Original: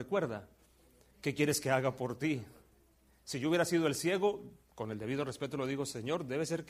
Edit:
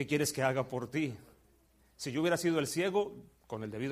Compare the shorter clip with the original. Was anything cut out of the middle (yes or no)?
no